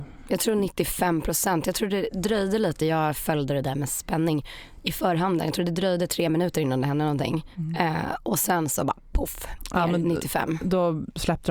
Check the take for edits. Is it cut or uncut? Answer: uncut